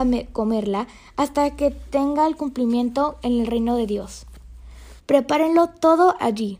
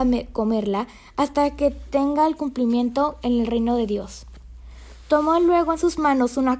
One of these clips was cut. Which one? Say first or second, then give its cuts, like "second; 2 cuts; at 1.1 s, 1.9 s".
first; 1 cut; at 5.0 s